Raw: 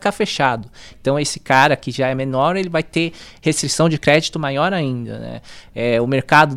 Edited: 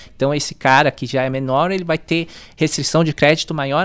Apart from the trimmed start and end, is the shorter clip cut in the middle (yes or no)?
no